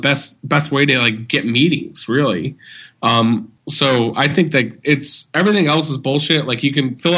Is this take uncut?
no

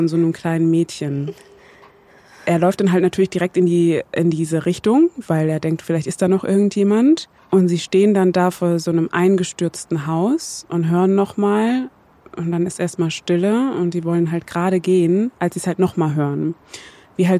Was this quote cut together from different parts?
yes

